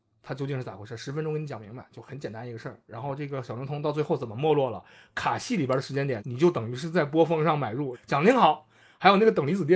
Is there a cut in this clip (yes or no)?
yes